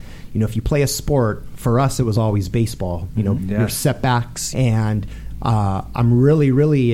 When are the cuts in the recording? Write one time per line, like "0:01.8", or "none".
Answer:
0:03.4
0:04.5

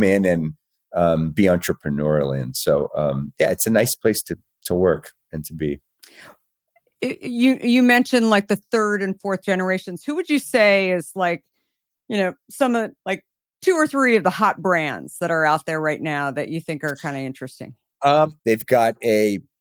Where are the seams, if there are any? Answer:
0:13.0
0:18.4

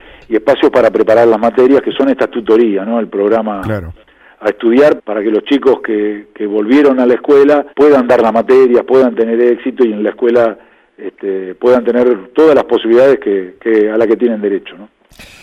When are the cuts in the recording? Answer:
0:05.0
0:07.7

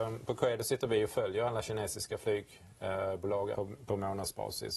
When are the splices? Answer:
0:03.5

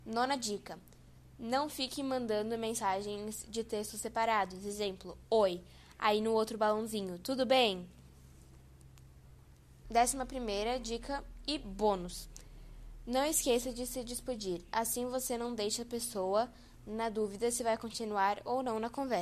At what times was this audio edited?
0:09.8

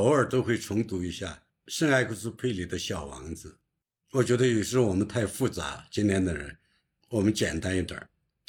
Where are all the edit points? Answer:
none

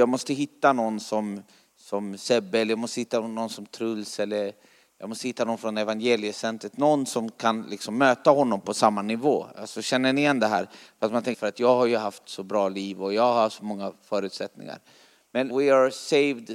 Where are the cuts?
0:11.3
0:15.5

